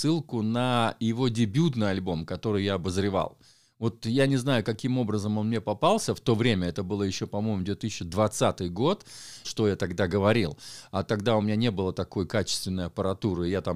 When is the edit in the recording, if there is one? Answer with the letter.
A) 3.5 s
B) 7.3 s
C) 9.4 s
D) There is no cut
C